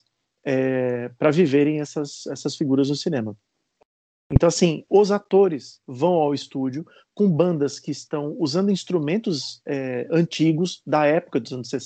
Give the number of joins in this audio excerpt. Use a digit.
1